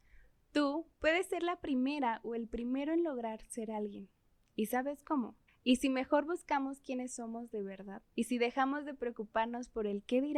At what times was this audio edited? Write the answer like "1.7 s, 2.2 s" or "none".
5.5 s, 8.1 s